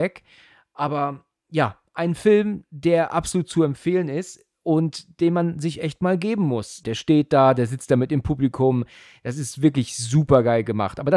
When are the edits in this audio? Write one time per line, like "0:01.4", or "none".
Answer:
0:06.8